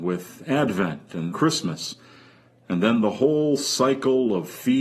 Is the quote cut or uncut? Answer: cut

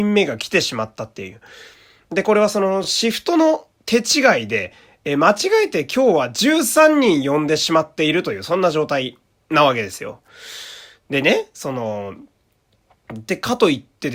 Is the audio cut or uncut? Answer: uncut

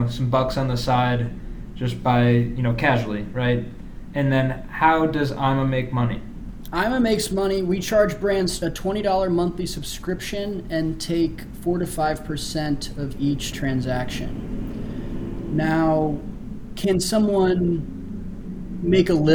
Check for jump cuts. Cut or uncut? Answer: uncut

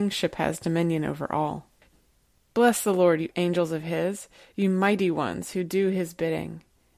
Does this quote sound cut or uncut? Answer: uncut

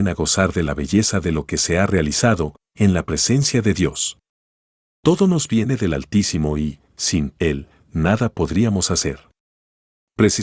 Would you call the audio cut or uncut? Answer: cut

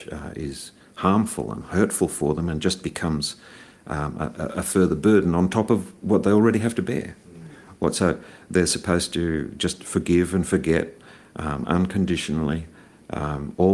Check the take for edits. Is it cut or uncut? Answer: uncut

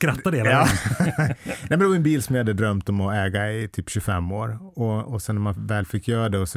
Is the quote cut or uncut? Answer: uncut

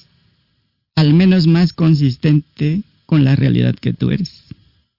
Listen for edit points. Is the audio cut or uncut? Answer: uncut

